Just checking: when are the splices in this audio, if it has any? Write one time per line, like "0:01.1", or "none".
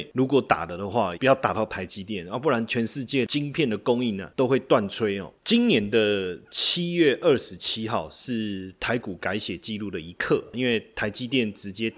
0:01.2